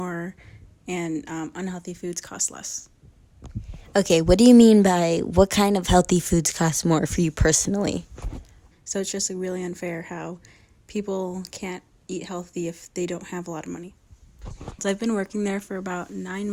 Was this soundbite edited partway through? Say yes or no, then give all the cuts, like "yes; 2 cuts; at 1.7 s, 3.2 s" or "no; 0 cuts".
yes; 2 cuts; at 8.7 s, 14.8 s